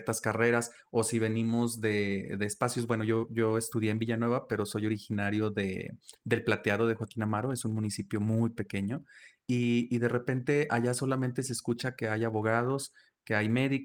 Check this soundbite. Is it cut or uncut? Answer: uncut